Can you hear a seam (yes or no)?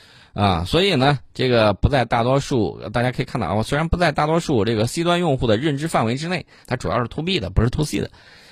yes